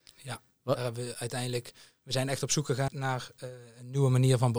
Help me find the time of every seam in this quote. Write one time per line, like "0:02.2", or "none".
0:02.9